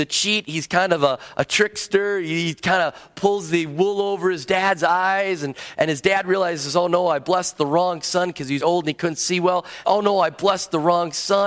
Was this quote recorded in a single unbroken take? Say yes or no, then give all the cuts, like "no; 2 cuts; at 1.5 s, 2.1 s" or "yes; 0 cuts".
no; 2 cuts; at 8.6 s, 9.8 s